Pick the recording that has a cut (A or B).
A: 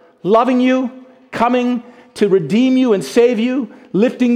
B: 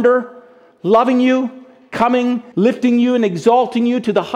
B